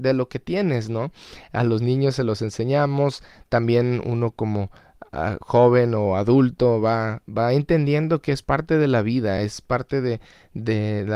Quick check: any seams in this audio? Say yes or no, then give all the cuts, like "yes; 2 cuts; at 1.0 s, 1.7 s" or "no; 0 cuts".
no; 0 cuts